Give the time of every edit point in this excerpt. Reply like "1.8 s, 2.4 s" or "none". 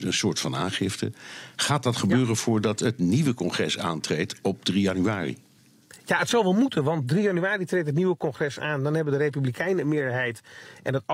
none